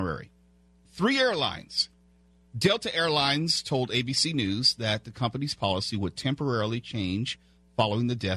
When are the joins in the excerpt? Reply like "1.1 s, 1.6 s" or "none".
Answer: none